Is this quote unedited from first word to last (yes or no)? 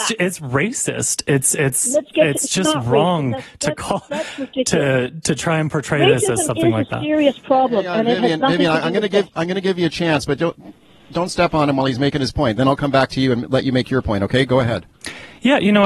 yes